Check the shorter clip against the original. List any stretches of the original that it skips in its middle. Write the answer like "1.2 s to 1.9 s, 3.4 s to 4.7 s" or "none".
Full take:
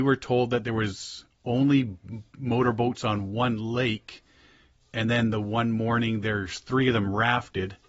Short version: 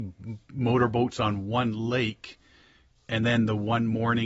none